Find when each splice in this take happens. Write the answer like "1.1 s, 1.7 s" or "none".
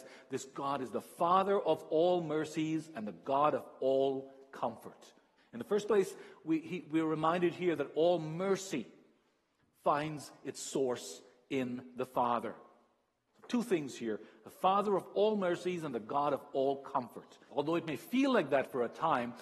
5.4 s, 13.3 s, 17.5 s